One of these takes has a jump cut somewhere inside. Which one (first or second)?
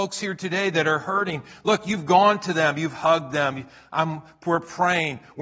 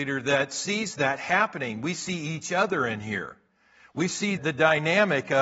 second